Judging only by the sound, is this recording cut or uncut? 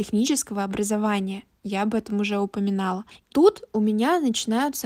cut